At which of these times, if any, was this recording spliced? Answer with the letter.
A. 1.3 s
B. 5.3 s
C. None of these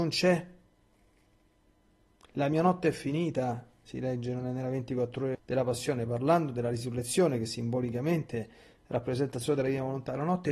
B